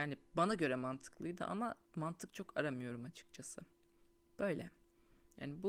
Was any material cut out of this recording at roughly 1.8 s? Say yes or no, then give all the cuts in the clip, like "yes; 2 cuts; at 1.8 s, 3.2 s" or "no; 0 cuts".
yes; 1 cut; at 1.8 s